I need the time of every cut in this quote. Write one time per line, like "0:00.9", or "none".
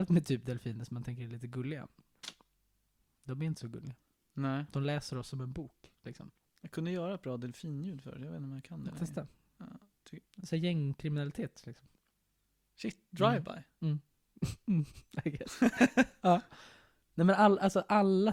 0:10.2